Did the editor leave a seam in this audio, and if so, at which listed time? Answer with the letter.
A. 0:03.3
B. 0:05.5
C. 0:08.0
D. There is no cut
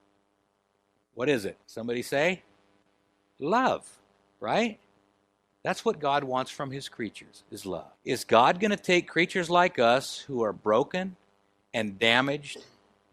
C